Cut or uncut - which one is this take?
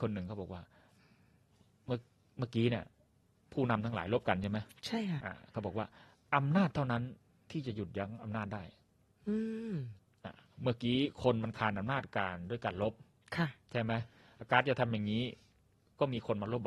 cut